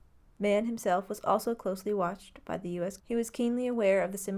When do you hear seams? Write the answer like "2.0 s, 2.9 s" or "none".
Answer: 3.0 s